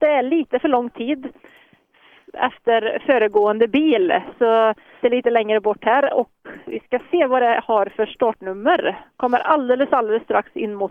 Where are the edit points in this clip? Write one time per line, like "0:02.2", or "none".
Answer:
0:05.0